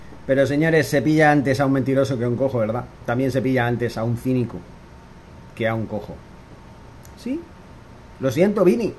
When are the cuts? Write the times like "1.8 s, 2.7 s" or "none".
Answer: 2.9 s, 7.1 s